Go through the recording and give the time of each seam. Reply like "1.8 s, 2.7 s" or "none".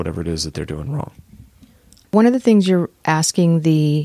none